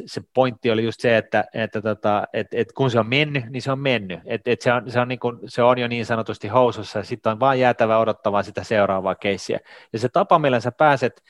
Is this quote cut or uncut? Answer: uncut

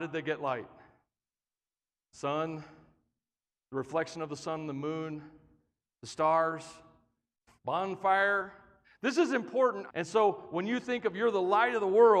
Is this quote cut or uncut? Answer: cut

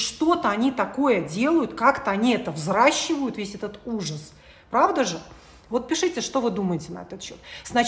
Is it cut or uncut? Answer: uncut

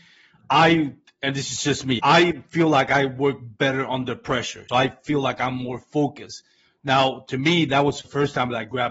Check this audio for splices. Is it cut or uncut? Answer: cut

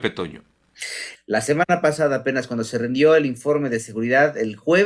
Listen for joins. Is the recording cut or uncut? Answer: cut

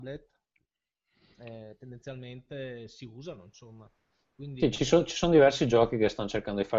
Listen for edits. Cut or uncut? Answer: uncut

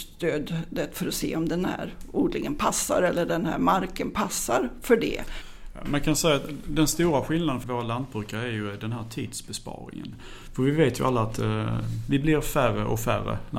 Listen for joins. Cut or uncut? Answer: cut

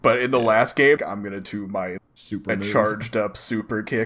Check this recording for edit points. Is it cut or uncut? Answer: cut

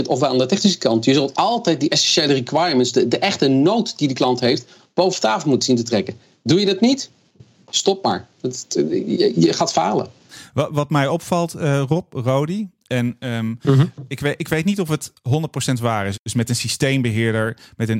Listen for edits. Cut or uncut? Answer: cut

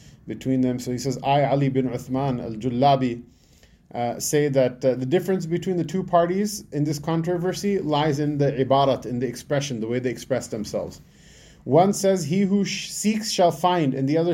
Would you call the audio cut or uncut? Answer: uncut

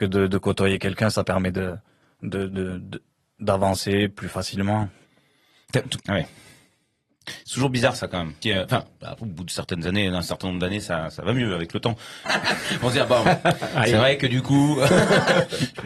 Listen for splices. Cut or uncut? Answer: cut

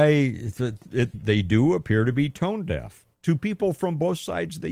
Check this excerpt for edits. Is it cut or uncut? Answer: cut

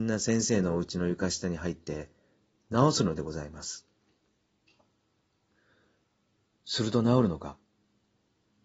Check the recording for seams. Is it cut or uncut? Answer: uncut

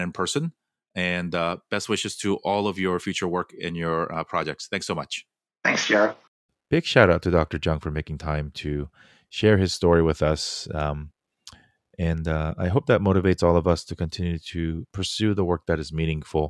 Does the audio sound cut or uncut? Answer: uncut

